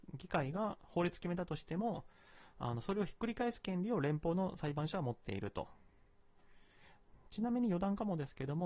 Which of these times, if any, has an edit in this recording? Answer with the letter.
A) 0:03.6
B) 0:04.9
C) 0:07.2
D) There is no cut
D